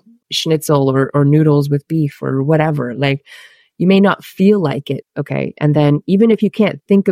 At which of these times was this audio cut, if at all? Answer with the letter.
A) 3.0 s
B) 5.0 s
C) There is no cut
B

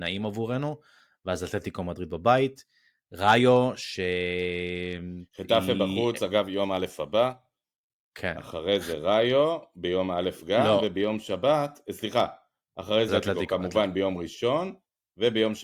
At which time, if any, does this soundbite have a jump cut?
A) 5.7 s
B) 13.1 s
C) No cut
B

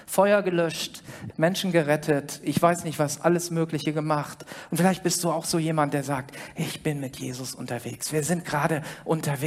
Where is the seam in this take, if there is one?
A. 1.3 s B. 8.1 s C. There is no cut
A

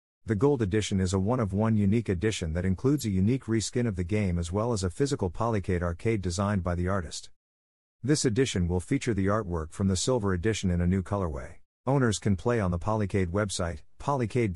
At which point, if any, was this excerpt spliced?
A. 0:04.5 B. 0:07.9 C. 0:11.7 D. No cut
C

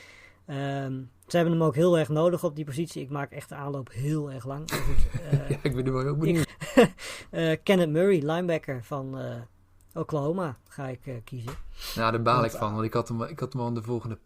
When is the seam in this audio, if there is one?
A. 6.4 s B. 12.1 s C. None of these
A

